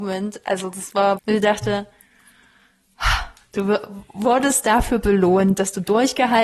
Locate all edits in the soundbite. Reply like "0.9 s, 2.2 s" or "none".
1.2 s